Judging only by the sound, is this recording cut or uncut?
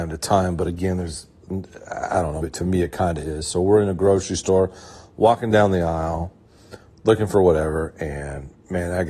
cut